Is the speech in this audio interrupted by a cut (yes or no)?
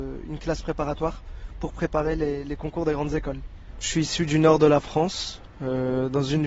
yes